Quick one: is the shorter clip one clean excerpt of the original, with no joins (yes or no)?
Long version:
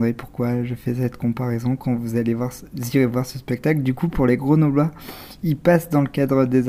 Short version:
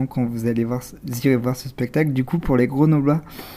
yes